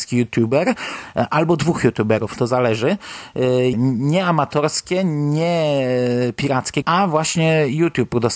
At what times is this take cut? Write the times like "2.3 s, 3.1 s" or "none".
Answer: 3.7 s, 6.8 s